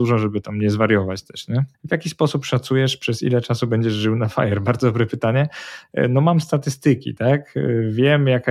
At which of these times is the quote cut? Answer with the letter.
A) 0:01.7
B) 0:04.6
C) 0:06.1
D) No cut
A